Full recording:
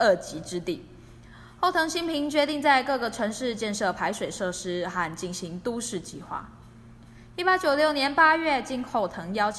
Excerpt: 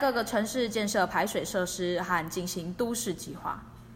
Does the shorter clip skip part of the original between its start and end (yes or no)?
no